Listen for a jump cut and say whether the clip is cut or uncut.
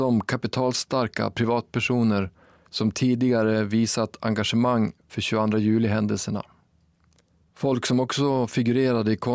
uncut